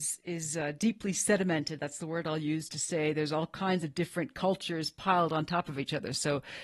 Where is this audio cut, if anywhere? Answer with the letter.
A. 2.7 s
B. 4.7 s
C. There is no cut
A